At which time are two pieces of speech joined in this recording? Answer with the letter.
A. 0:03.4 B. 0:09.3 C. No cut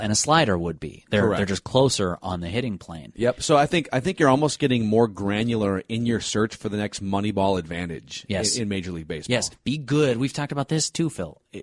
C